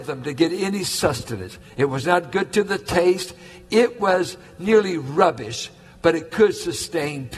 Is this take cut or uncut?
uncut